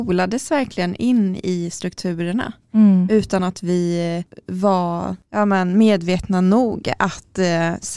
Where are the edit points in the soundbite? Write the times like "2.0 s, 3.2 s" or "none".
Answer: none